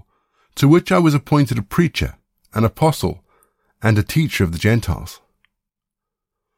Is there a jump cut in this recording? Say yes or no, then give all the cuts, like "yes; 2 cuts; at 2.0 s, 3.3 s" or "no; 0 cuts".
no; 0 cuts